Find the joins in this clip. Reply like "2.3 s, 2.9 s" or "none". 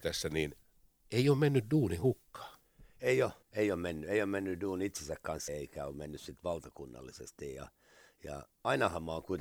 3.4 s, 5.5 s

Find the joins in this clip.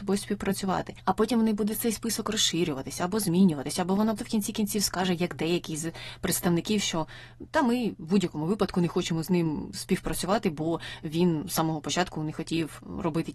4.2 s

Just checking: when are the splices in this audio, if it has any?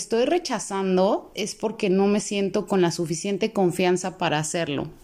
1.3 s

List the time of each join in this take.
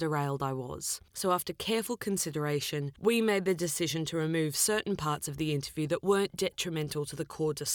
1.1 s

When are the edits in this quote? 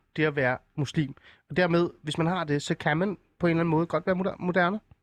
none

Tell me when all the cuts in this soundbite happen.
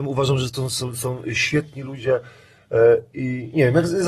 none

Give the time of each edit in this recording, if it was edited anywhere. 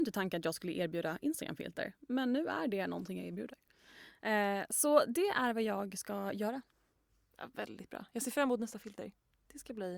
none

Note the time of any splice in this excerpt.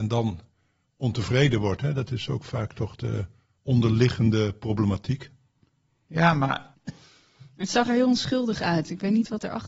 6.7 s

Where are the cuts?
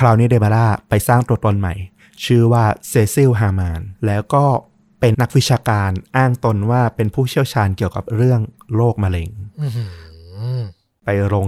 4.0 s, 5.1 s

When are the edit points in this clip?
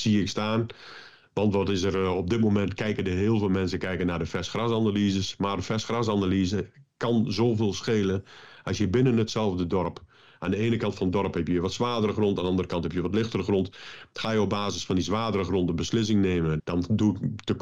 16.6 s

